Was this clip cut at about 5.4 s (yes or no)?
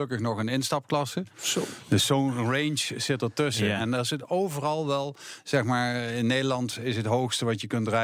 no